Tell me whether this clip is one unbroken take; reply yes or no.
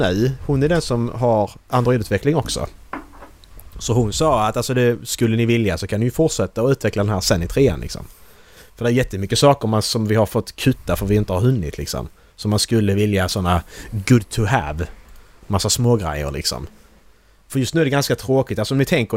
yes